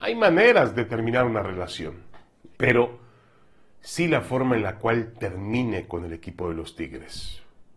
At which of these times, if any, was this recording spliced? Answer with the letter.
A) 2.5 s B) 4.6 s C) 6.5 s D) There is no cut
A